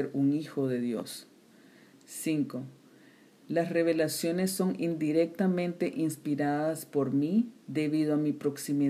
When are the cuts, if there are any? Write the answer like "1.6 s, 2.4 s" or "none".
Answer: 1.9 s, 7.6 s